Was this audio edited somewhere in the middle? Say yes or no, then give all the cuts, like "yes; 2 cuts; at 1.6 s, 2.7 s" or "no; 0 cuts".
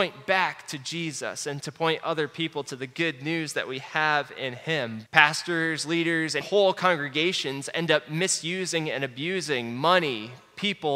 yes; 2 cuts; at 5.1 s, 6.4 s